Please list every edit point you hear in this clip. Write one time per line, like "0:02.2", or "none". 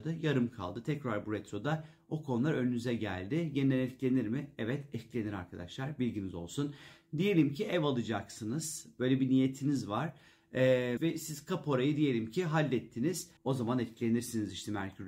0:11.0
0:13.4